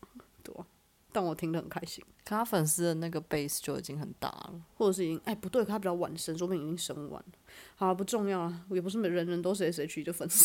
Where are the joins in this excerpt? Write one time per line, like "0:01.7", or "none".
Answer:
0:04.7